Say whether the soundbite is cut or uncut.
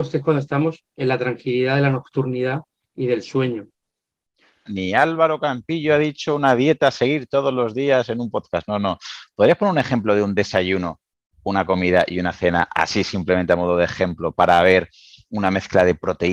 cut